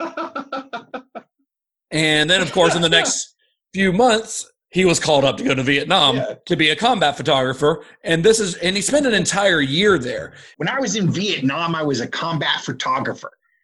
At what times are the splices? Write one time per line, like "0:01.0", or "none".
0:10.5